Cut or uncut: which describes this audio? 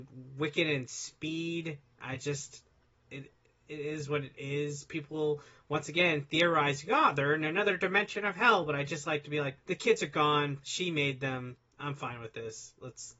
cut